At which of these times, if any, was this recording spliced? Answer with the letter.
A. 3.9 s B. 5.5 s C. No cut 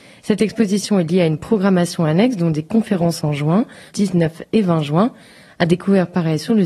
A